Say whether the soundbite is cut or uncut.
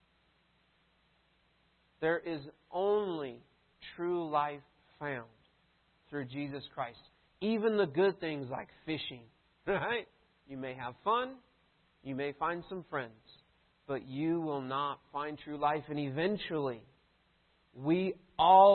cut